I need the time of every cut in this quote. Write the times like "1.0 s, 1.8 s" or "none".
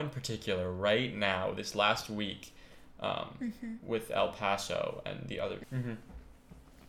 5.6 s

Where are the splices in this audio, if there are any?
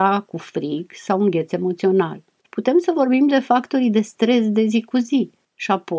2.4 s

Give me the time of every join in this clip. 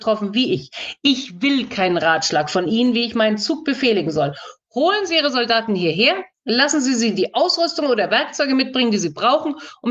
none

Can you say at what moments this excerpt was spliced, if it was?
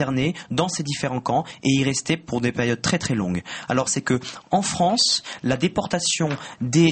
3.9 s

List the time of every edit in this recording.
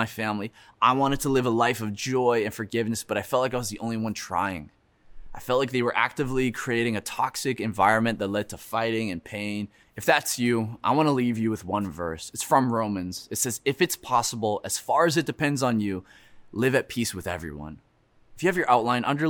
none

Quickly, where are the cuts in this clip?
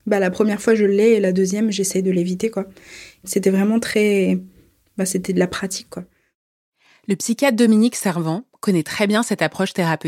none

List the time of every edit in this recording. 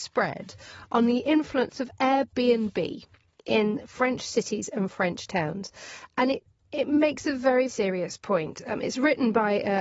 7.7 s

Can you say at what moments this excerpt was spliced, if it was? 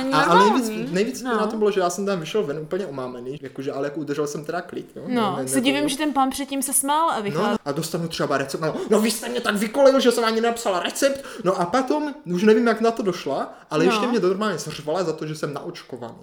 3.4 s, 7.6 s

